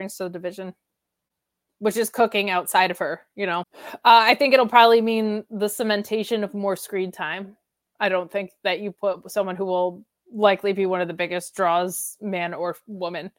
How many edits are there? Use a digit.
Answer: 1